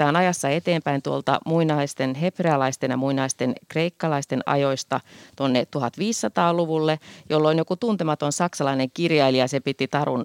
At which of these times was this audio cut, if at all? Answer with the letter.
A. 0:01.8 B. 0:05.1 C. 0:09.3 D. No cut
D